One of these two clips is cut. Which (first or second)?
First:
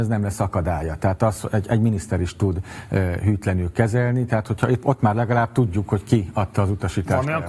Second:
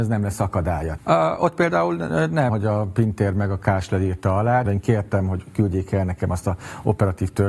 second